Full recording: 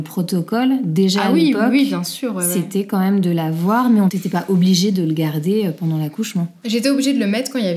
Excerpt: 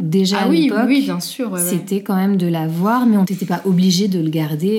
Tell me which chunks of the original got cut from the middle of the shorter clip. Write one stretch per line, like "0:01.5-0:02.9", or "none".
none